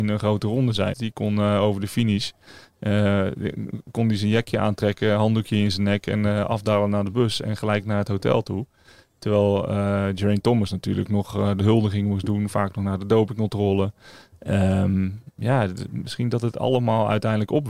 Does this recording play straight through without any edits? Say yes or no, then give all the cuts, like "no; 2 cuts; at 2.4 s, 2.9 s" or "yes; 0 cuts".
no; 1 cut; at 0.9 s